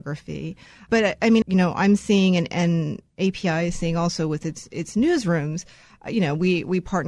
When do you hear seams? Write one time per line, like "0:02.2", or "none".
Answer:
0:01.4